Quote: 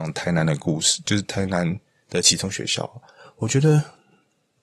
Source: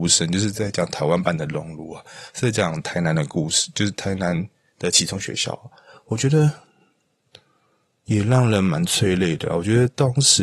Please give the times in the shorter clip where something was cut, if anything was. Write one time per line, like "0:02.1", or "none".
none